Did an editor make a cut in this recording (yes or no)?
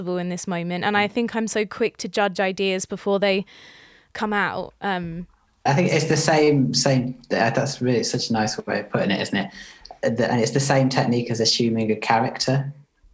yes